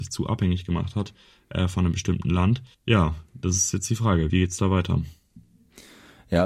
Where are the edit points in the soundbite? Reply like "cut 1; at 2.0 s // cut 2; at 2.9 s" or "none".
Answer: cut 1; at 2.7 s // cut 2; at 4.3 s